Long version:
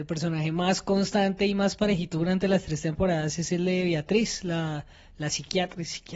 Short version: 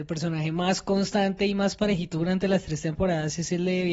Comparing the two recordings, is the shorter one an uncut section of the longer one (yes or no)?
yes